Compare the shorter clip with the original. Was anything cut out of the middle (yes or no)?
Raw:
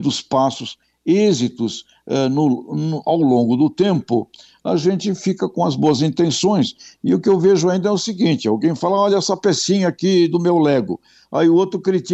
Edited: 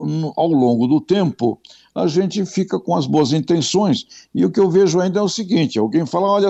no